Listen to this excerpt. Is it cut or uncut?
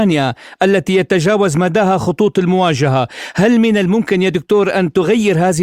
uncut